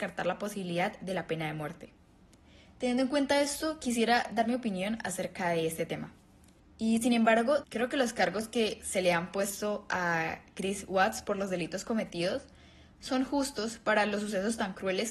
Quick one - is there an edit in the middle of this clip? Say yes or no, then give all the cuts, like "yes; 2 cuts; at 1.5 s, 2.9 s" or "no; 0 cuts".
yes; 2 cuts; at 6.6 s, 7.6 s